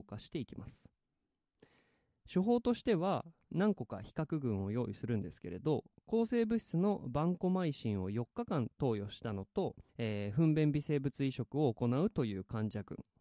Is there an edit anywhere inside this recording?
yes; 2 cuts; at 3.5 s, 9.9 s

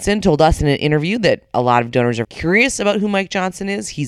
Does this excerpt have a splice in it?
yes; 1 cut; at 2.2 s

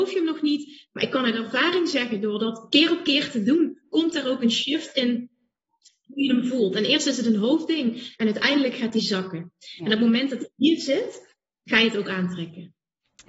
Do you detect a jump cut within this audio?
no; 0 cuts

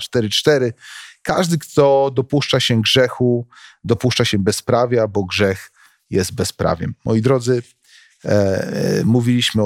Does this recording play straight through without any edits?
yes; 0 cuts

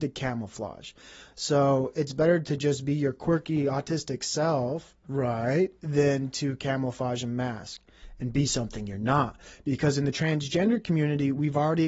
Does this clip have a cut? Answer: no; 0 cuts

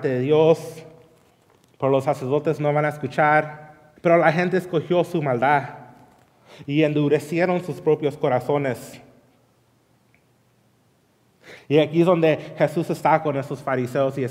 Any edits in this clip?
yes; 2 cuts; at 4.0 s, 11.6 s

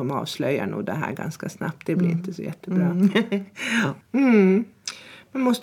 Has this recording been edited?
yes; 1 cut; at 4.0 s

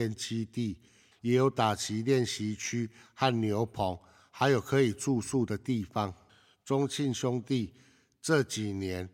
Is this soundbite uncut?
no; 1 cut; at 1.1 s

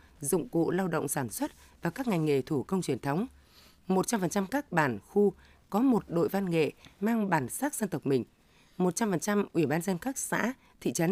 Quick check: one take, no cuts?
yes; 0 cuts

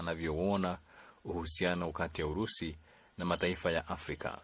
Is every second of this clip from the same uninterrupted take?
yes; 0 cuts

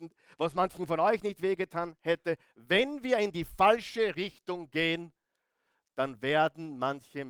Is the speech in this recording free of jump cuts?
yes; 0 cuts

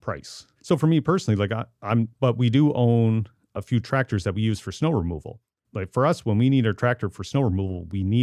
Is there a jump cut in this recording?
yes; 2 cuts; at 2.1 s, 5.6 s

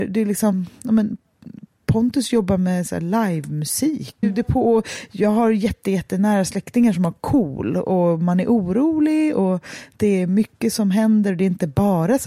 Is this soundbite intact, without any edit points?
no; 1 cut; at 4.2 s

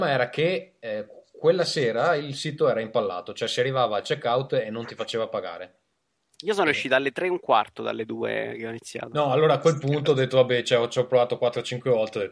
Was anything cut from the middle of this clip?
no; 0 cuts

